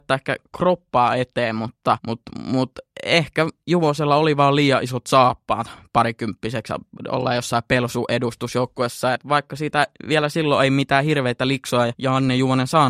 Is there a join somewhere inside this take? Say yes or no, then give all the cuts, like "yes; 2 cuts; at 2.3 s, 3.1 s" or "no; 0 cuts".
no; 0 cuts